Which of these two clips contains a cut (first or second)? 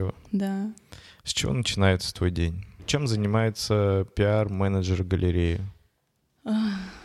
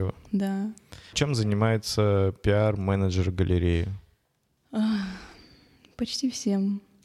second